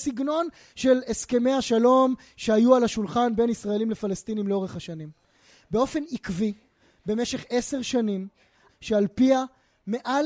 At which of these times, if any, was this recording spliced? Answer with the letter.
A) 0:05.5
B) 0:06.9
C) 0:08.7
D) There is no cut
C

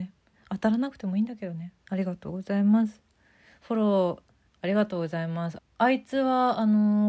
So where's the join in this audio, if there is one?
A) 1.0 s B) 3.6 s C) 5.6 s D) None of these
C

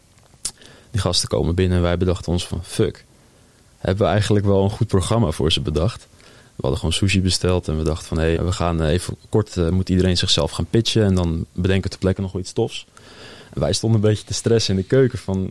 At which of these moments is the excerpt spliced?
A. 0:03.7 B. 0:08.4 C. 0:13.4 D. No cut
B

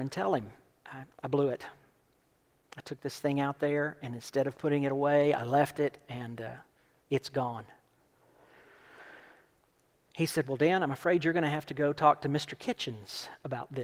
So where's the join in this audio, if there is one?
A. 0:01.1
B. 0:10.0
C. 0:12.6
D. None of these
A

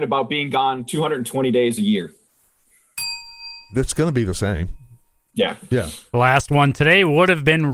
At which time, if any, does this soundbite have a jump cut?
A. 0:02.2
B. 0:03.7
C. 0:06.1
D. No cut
C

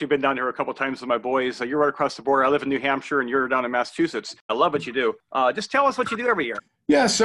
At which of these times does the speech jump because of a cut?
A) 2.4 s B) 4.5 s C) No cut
B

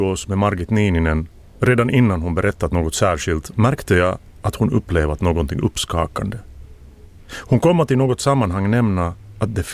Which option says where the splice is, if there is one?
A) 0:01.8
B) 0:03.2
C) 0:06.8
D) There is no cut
D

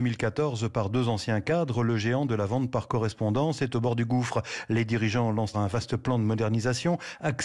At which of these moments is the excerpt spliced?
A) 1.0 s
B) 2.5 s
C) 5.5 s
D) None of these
C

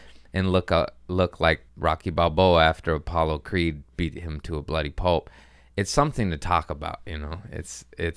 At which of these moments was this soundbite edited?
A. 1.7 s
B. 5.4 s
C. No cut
A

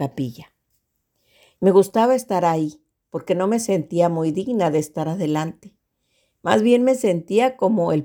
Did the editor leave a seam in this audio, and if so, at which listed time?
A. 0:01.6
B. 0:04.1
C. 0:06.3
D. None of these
A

